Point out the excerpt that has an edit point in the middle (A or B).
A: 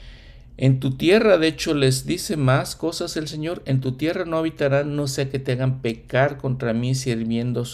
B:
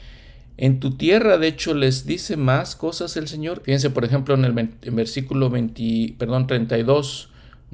B